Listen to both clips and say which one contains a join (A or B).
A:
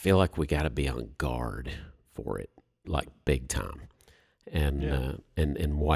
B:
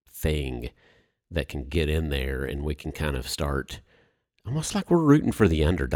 A